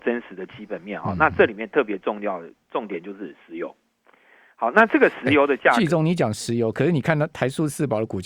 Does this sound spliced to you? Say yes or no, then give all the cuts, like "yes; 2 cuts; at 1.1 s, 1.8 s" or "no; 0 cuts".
no; 0 cuts